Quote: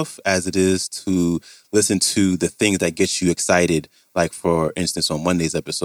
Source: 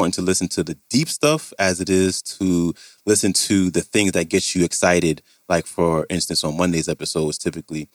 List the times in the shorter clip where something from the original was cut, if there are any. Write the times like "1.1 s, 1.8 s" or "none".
none